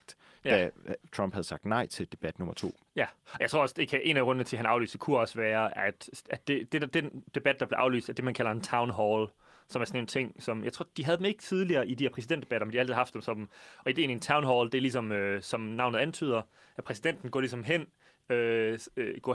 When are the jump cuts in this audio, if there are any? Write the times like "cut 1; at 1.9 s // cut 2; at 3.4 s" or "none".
none